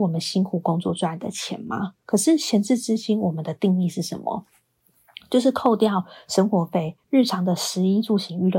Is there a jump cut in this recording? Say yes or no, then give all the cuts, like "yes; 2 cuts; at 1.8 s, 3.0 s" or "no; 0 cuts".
yes; 2 cuts; at 2.0 s, 7.0 s